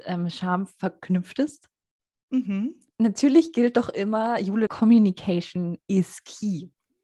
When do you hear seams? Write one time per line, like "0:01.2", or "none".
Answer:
0:02.9
0:04.7